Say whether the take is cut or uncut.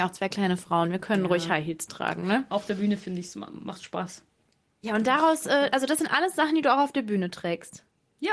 uncut